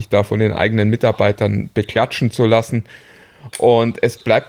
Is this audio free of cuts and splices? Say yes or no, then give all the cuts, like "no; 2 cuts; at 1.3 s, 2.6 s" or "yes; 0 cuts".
yes; 0 cuts